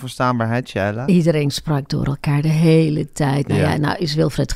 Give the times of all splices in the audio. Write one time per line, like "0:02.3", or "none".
none